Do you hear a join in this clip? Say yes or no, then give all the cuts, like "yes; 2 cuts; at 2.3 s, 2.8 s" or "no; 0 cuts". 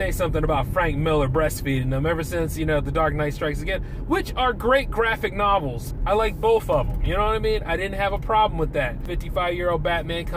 no; 0 cuts